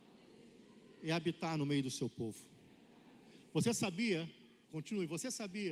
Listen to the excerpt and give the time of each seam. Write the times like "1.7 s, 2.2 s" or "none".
4.6 s